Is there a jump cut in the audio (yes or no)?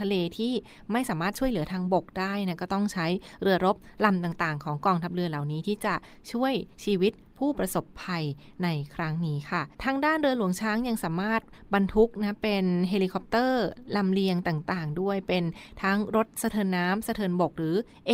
yes